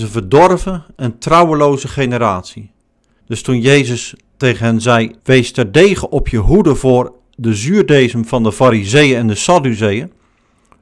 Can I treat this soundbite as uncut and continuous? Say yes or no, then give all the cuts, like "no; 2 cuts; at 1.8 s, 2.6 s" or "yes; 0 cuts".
no; 2 cuts; at 3.2 s, 5.2 s